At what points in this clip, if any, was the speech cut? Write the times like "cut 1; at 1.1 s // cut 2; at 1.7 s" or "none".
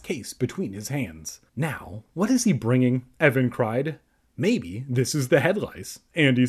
cut 1; at 1.5 s